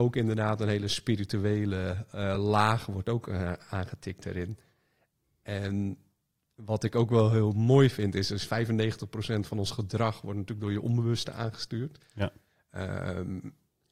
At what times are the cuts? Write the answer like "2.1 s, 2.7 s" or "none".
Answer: none

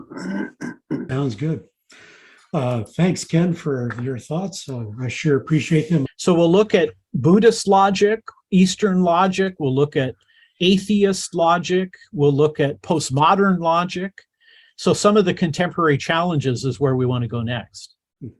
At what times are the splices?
1.1 s, 6.1 s

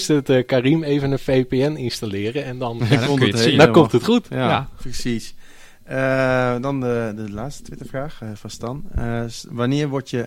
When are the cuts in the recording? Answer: 2.8 s

